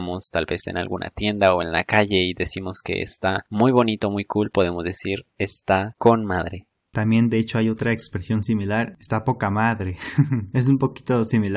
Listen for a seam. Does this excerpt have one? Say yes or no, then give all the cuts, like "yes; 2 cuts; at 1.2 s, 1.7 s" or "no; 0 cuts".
no; 0 cuts